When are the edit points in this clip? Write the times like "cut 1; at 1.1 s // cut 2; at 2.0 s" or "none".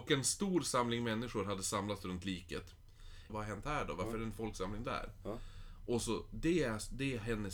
cut 1; at 3.3 s